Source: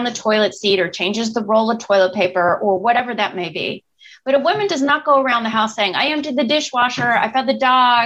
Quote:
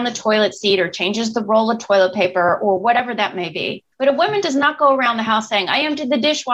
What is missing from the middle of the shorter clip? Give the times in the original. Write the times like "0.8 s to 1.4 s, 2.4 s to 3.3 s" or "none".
3.9 s to 4.2 s